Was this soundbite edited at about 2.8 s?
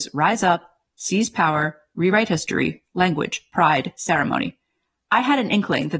yes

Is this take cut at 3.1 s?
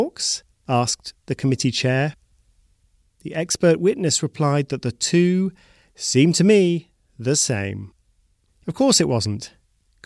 no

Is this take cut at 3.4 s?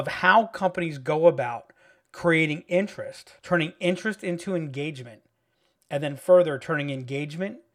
yes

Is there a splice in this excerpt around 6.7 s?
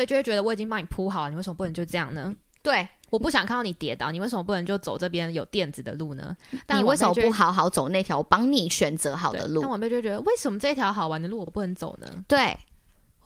no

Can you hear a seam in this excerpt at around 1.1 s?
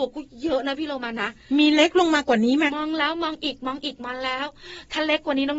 no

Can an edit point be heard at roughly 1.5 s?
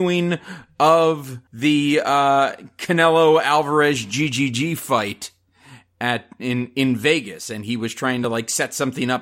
yes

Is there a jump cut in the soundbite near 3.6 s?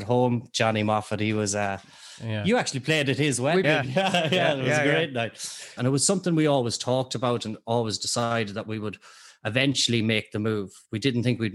yes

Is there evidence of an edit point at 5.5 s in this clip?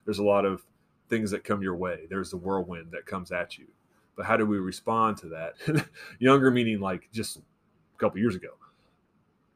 yes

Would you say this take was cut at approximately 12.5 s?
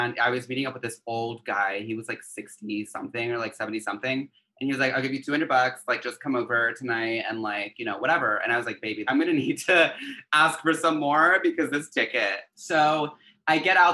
yes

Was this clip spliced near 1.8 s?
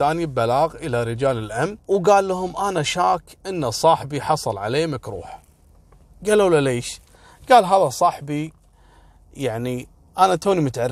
yes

